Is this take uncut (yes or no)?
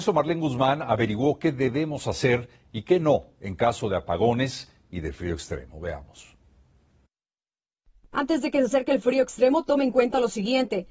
yes